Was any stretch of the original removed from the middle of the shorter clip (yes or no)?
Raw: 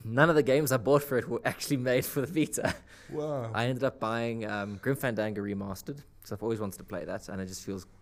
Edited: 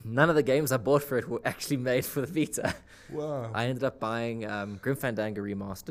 no